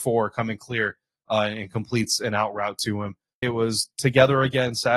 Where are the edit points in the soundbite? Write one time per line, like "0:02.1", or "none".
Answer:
0:03.4